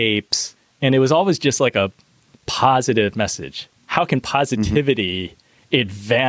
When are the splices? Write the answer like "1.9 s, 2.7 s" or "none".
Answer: none